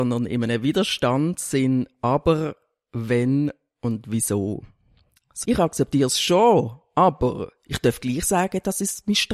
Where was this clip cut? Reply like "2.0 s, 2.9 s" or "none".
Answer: 5.4 s